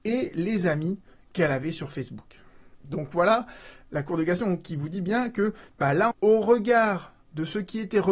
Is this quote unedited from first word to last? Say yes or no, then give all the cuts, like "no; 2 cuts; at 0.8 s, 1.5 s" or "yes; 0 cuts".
no; 2 cuts; at 2.7 s, 6.1 s